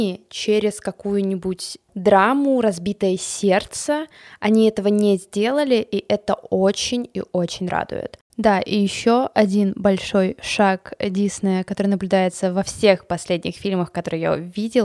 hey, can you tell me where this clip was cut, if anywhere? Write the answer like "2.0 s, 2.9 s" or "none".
8.3 s